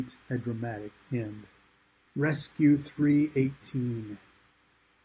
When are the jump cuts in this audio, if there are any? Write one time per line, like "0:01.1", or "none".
0:02.1